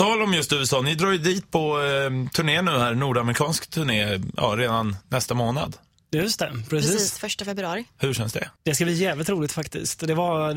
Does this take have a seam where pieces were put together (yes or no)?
no